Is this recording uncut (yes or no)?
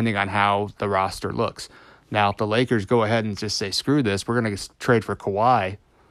yes